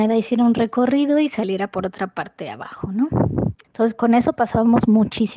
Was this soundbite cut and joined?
yes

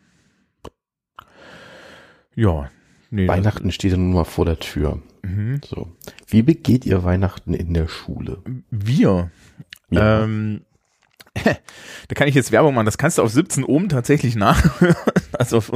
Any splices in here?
no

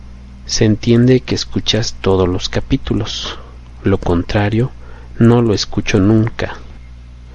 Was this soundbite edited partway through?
no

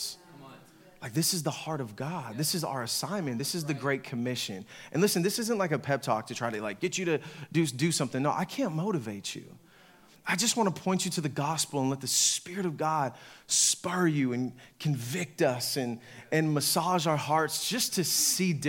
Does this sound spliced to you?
no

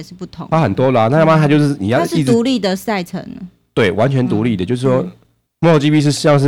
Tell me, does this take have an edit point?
no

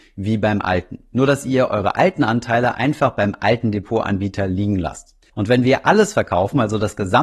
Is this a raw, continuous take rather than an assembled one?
no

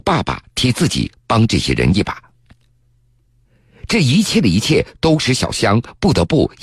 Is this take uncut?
no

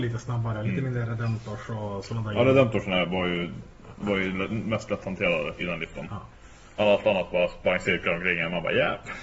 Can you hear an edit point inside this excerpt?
yes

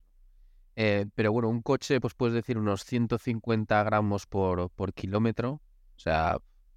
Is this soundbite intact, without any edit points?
yes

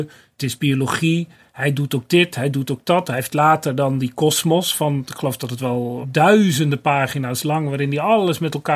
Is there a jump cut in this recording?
yes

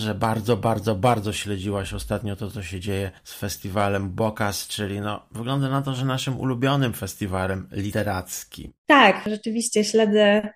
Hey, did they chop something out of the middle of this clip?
yes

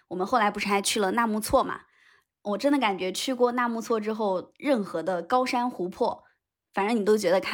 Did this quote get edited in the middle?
no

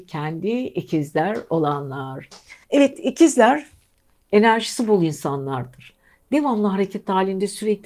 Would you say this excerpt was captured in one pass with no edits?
no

